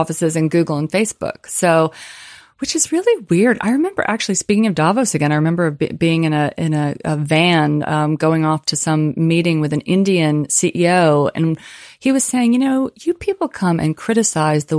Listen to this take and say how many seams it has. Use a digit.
0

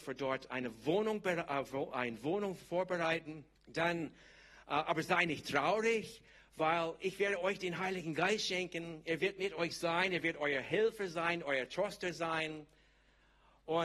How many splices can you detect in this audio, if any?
1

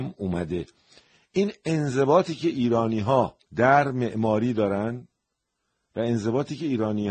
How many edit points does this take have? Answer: 1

